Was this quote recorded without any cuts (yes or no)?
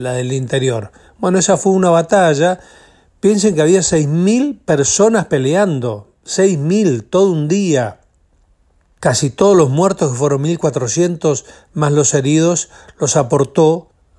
yes